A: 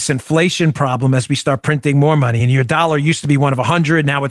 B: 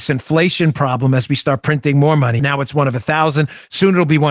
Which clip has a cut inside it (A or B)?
B